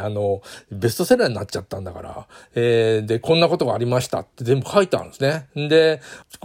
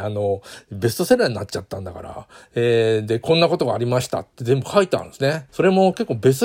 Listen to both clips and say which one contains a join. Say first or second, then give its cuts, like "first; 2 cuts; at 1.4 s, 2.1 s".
second; 1 cut; at 5.5 s